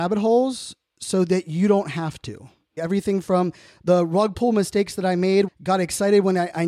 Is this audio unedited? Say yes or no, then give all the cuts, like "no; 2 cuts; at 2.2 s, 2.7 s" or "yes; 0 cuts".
no; 2 cuts; at 2.8 s, 5.5 s